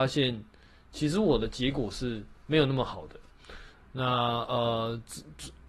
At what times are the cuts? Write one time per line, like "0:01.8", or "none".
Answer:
0:03.7

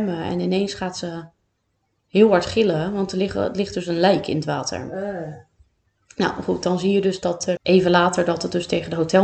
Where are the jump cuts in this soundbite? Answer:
0:07.6

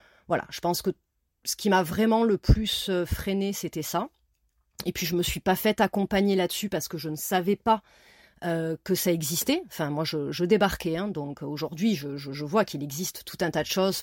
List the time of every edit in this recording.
none

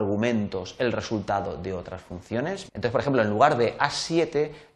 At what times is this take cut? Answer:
0:02.7

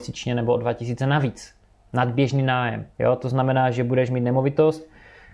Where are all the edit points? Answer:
0:02.9

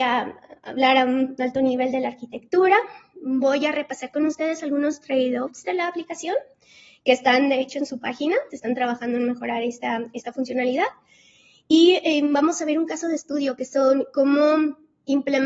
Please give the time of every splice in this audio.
0:08.5

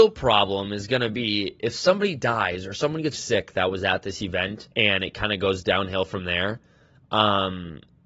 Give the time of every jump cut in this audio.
0:03.1
0:04.7

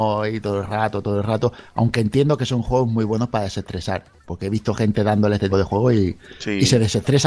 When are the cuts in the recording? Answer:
0:05.5

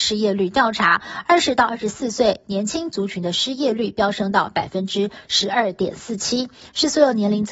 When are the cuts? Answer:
none

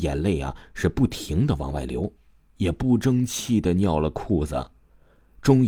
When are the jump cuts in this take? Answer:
none

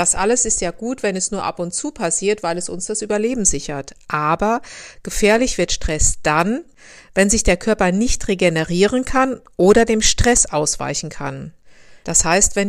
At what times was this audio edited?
none

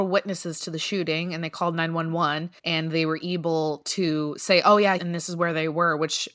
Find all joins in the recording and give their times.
0:02.6
0:05.0

